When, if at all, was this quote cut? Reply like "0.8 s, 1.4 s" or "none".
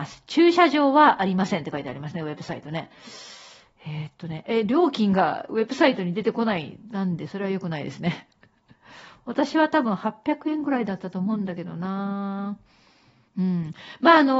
none